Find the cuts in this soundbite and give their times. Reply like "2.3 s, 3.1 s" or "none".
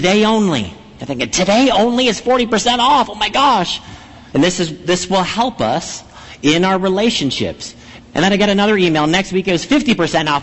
4.3 s, 8.0 s